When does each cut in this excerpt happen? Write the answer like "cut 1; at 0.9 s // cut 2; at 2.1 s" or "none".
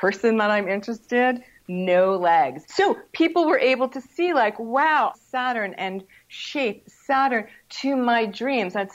cut 1; at 2.6 s // cut 2; at 5.1 s